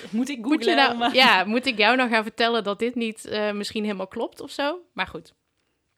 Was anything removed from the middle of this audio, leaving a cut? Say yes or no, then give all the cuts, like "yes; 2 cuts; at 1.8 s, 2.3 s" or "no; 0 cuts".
no; 0 cuts